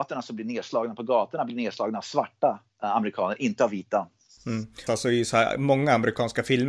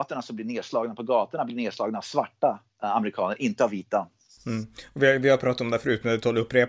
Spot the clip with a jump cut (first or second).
first